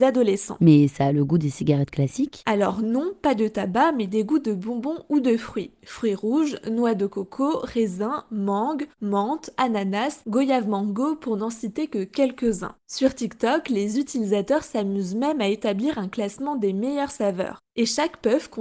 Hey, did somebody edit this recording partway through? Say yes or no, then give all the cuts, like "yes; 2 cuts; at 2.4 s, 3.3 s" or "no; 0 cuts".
no; 0 cuts